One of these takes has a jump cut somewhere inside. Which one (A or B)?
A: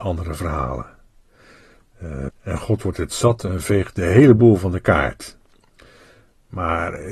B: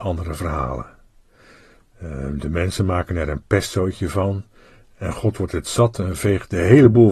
A